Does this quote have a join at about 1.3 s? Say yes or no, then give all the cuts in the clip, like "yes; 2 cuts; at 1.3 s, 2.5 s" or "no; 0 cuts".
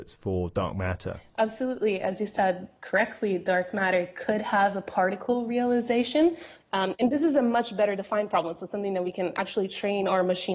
no; 1 cut; at 6.6 s